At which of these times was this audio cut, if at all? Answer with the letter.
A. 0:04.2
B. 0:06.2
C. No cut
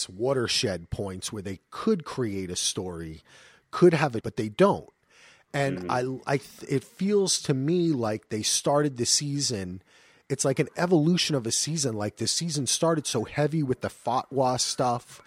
A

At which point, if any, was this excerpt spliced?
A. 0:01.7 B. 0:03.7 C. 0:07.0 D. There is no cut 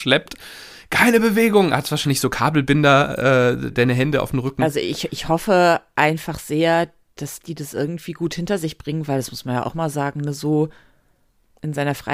B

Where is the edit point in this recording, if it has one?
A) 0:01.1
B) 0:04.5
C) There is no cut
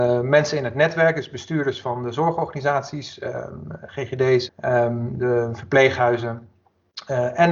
B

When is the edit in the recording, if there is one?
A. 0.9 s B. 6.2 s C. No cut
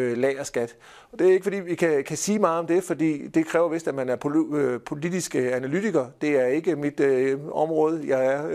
C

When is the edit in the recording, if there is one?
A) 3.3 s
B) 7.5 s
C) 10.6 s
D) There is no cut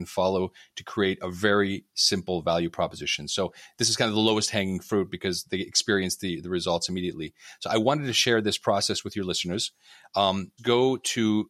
C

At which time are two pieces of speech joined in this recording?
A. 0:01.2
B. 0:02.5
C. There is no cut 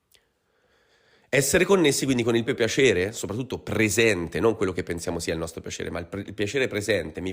B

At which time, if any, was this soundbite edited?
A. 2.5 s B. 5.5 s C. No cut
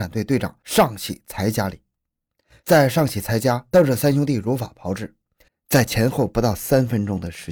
B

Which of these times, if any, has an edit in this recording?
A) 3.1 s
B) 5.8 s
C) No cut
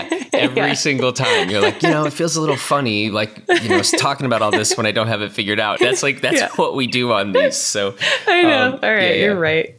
B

